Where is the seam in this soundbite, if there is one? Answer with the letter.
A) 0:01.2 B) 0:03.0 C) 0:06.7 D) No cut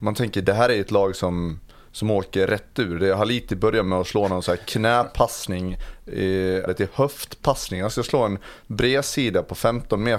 C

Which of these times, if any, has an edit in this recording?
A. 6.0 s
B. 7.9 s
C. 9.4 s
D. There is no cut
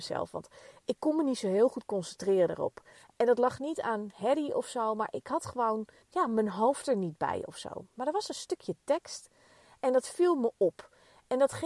A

